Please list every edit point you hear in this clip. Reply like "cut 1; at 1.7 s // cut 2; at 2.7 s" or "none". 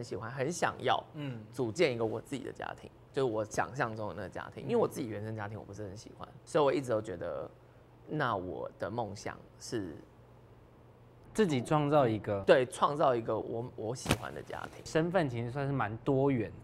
cut 1; at 13.4 s // cut 2; at 14.9 s